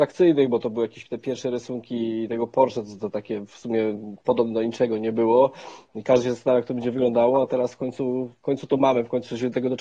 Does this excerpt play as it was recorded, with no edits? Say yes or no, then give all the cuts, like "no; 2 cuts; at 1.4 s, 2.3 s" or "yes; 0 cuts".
yes; 0 cuts